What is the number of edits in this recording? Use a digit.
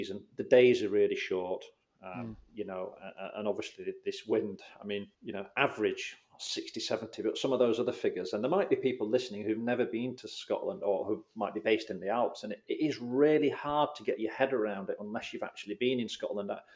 1